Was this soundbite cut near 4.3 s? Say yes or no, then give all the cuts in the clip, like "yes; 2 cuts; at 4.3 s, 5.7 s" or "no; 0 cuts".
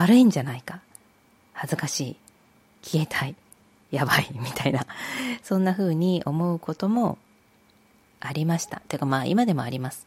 no; 0 cuts